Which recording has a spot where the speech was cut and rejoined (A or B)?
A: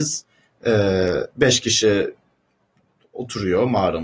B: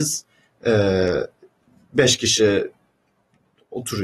A